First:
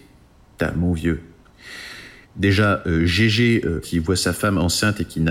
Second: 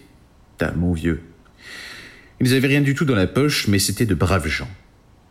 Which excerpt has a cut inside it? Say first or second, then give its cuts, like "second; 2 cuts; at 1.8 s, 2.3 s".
first; 2 cuts; at 2.2 s, 3.8 s